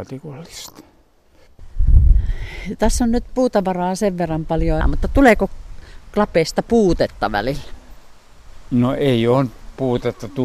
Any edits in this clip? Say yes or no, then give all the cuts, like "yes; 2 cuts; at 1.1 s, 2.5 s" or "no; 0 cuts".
yes; 1 cut; at 4.8 s